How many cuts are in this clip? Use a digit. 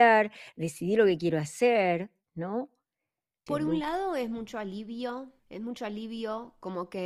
2